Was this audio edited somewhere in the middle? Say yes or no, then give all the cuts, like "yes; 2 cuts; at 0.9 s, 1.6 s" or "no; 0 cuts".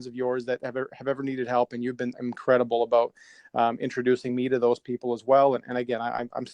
no; 0 cuts